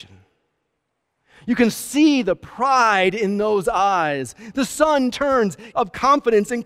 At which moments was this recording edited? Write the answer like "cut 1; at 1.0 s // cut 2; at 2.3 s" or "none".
cut 1; at 5.7 s